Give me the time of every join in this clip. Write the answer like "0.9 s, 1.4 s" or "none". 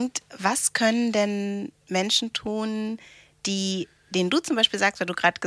none